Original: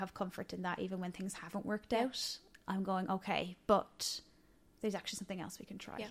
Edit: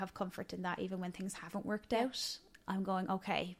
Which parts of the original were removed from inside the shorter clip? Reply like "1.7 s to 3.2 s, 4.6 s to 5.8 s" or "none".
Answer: none